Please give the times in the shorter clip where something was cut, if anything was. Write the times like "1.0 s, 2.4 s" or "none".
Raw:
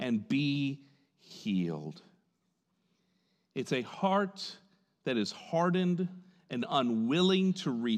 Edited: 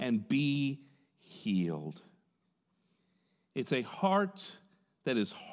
none